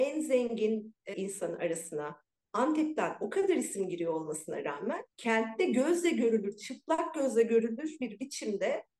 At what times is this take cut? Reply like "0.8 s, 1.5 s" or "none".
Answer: 1.1 s, 5.1 s